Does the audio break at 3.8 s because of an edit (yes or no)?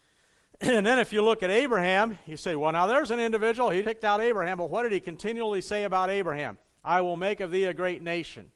yes